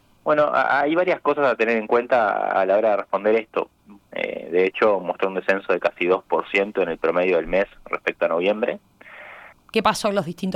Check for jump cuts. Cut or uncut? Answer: cut